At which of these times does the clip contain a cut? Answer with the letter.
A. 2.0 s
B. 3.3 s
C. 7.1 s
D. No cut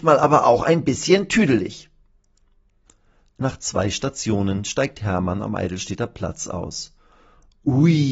D